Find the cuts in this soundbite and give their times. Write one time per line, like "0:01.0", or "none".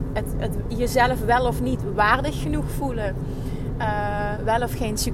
none